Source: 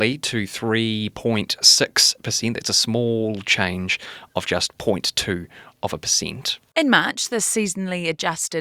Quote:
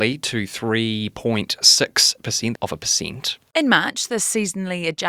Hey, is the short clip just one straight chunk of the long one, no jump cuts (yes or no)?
no